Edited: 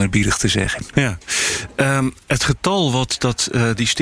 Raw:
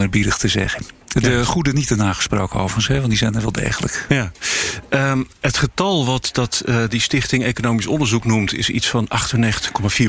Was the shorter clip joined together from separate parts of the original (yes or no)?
yes